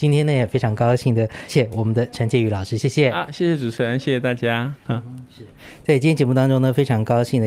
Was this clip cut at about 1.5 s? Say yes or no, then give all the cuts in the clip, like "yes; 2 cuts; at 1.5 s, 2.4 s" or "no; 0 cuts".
yes; 2 cuts; at 1.5 s, 4.8 s